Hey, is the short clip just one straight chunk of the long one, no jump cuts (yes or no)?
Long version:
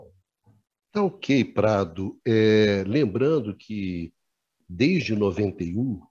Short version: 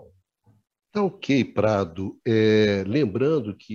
yes